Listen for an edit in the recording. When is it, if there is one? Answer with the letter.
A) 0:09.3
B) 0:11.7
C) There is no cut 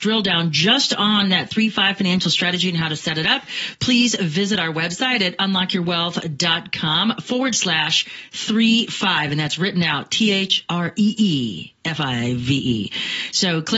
C